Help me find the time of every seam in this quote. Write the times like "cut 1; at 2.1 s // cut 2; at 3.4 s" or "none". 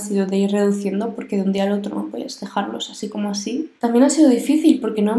cut 1; at 3.8 s